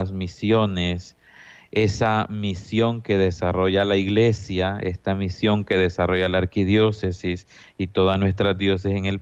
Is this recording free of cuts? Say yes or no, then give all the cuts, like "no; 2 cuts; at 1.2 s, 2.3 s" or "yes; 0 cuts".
yes; 0 cuts